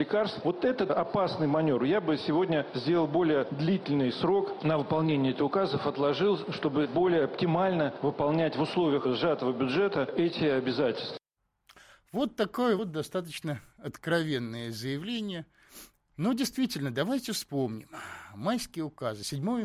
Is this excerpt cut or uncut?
uncut